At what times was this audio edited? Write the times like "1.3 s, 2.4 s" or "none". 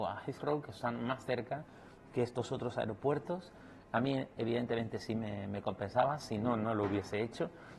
none